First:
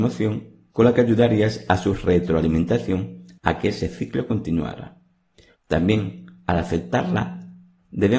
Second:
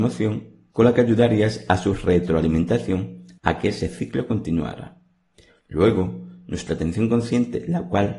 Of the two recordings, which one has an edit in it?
first; 1 cut; at 5.5 s

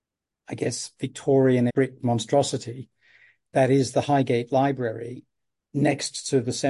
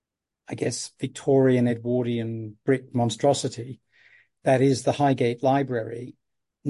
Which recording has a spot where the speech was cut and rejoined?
first; 1 cut; at 1.7 s

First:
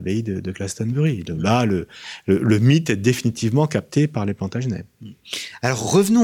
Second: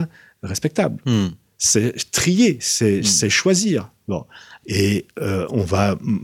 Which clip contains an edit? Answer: second; 1 cut; at 4.6 s

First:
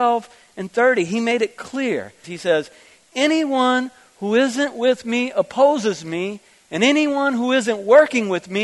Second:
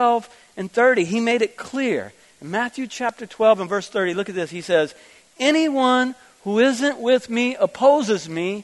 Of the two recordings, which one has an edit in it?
first; 1 cut; at 2.2 s

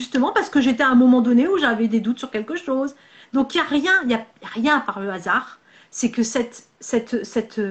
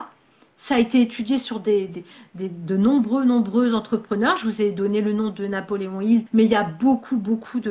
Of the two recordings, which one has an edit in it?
second; 2 cuts; at 1.9 s, 6.3 s

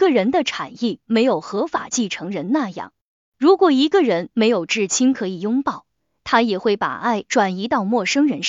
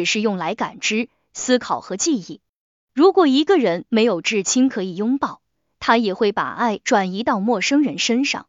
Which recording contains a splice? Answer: first; 1 cut; at 3.2 s

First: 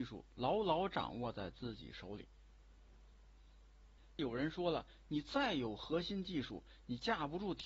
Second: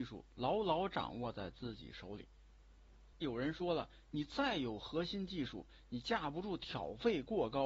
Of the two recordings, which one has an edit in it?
second; 1 cut; at 3.1 s

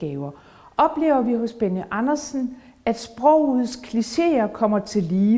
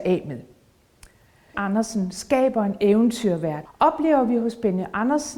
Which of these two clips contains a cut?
second; 2 cuts; at 1.5 s, 3.7 s

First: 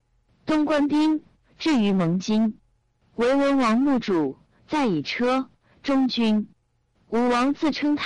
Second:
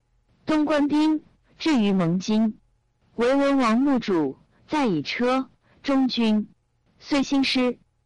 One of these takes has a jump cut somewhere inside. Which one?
second; 1 cut; at 6.9 s

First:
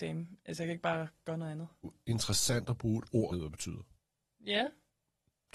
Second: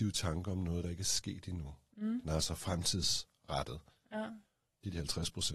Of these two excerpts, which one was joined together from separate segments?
first; 2 cuts; at 1.8 s, 3.3 s

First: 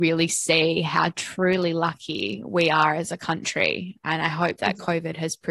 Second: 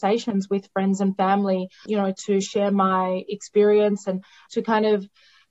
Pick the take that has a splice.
second; 2 cuts; at 1.9 s, 4.5 s

